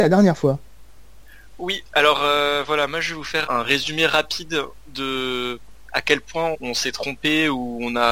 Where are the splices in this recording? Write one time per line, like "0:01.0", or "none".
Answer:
0:03.5
0:06.5